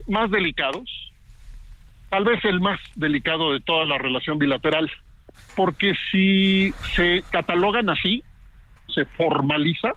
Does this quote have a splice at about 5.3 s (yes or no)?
yes